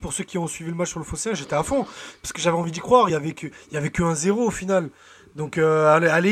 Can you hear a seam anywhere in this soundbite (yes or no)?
no